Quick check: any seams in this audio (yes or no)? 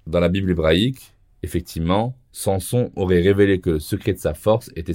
no